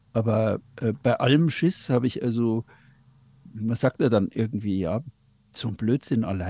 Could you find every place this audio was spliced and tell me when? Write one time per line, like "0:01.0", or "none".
none